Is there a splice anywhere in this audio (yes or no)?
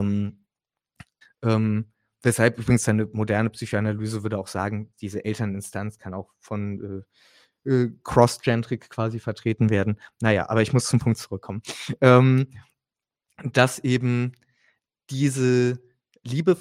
yes